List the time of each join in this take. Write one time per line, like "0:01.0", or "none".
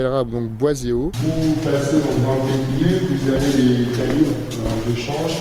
0:01.1